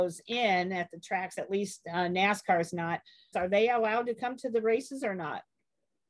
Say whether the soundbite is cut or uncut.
cut